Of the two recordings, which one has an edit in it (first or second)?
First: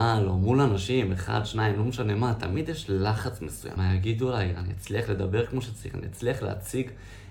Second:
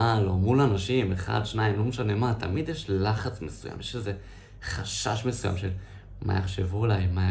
first